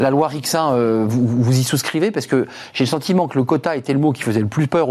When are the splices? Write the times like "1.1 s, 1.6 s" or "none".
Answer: none